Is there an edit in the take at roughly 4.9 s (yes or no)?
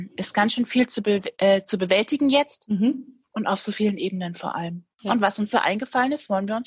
yes